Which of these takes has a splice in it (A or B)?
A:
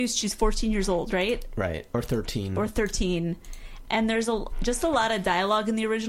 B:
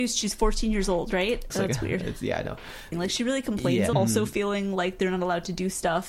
B